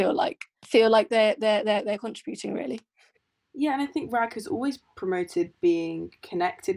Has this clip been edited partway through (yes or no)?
no